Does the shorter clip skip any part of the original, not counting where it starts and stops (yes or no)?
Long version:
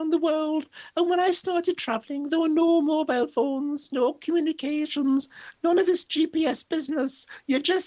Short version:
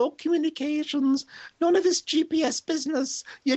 no